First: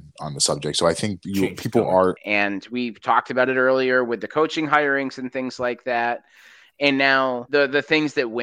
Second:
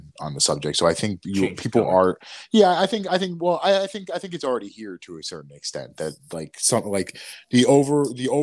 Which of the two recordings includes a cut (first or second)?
first